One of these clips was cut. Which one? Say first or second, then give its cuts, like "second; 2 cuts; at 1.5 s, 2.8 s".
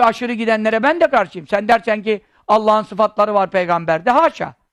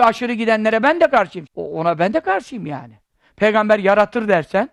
second; 1 cut; at 1.5 s